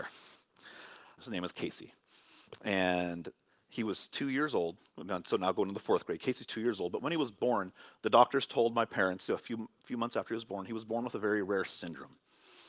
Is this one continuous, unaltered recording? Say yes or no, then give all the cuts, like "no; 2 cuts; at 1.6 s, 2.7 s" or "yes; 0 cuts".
no; 1 cut; at 1.2 s